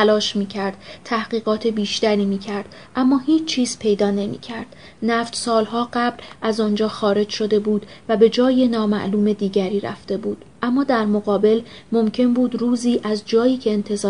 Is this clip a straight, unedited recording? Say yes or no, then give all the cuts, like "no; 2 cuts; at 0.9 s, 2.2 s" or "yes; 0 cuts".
yes; 0 cuts